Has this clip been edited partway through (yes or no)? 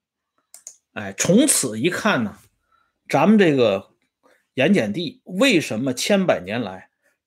no